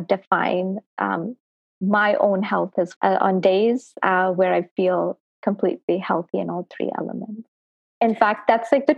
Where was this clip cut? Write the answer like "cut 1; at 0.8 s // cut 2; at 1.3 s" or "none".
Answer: cut 1; at 3.0 s